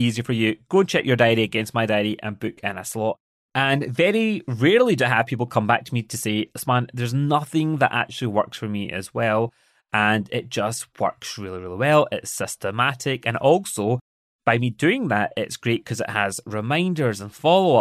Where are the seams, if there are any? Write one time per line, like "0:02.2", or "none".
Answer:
none

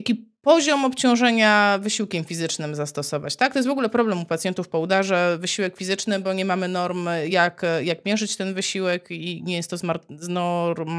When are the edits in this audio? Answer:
none

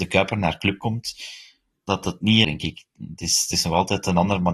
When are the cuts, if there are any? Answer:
0:02.4

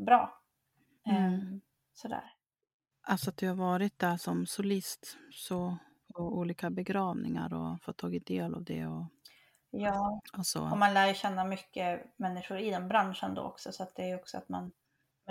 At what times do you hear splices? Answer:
0:02.9

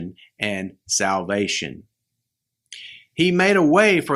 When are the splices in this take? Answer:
none

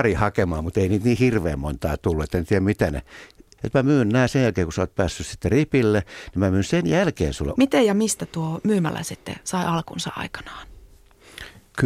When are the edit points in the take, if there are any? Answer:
0:03.6
0:07.6

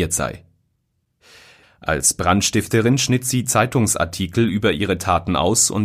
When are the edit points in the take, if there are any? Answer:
0:01.6

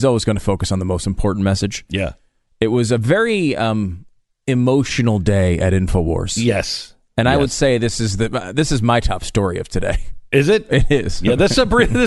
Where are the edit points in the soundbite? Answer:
none

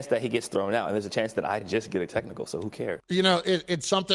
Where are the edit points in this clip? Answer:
none

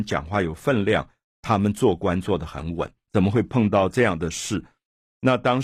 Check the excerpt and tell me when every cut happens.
0:03.1

